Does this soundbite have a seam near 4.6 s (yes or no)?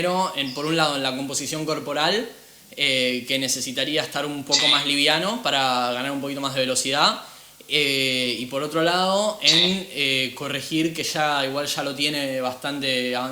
no